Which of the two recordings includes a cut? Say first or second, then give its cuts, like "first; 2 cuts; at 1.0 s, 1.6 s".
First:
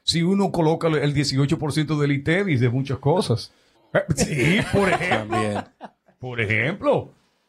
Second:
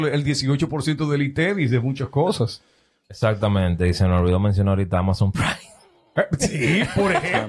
first; 1 cut; at 3.7 s